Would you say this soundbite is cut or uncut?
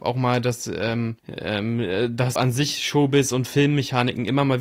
cut